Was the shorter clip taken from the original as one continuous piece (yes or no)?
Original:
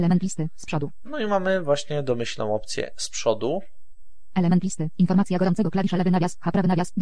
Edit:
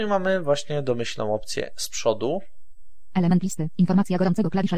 yes